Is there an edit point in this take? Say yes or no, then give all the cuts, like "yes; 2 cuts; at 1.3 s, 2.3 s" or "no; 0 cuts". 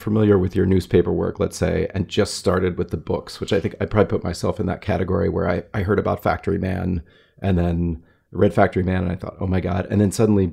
no; 0 cuts